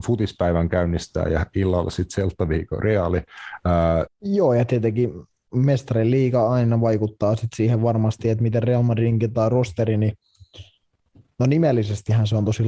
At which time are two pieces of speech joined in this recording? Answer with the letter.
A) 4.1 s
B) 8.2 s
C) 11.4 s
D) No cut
A